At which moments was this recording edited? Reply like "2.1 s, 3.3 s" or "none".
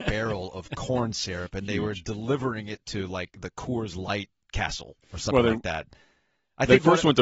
none